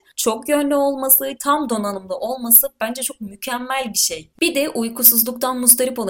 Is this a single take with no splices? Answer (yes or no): no